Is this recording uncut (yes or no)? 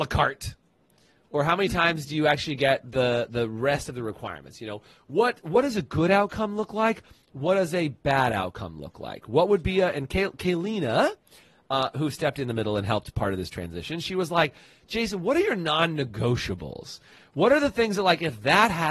yes